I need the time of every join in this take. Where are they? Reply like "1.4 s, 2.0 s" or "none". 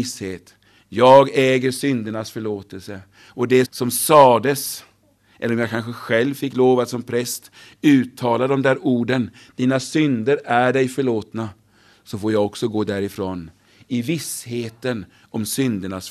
3.6 s